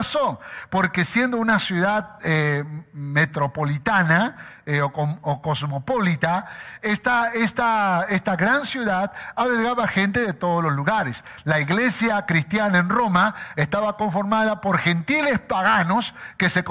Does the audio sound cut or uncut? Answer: uncut